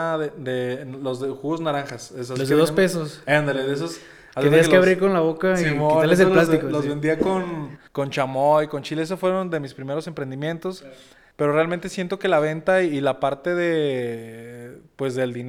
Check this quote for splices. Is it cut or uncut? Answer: cut